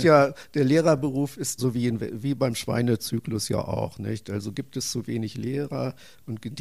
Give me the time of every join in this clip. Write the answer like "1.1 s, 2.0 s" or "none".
1.6 s